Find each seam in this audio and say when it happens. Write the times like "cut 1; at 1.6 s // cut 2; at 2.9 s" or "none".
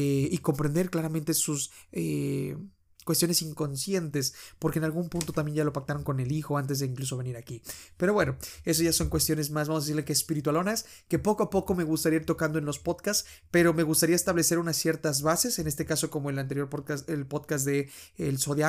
none